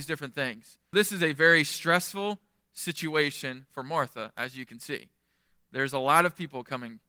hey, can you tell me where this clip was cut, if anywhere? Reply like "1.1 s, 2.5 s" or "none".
0.9 s